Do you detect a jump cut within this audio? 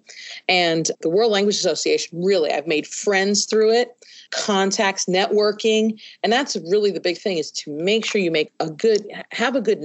no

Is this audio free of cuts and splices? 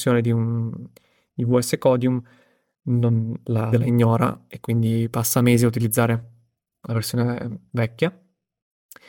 no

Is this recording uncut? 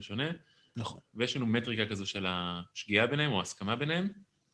yes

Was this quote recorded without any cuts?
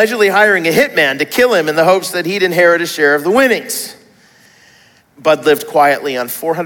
no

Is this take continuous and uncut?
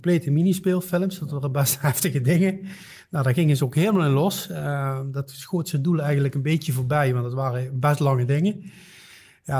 yes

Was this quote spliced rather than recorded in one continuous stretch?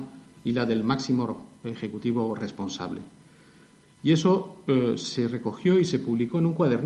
no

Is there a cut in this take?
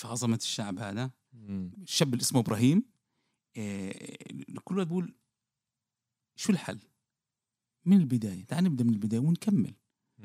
yes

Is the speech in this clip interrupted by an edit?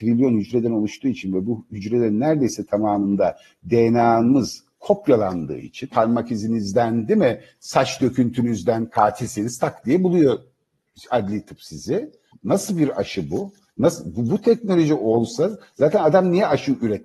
yes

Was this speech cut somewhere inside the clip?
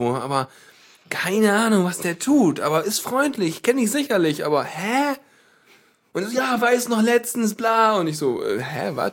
no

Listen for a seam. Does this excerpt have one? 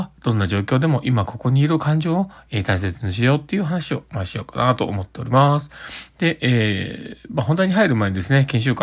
no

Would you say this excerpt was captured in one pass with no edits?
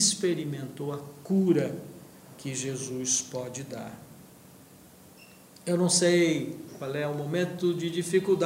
yes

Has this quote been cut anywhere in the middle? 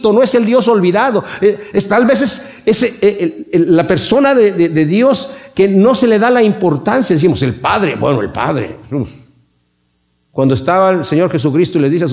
no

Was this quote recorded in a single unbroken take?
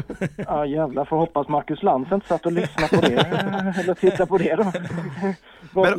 yes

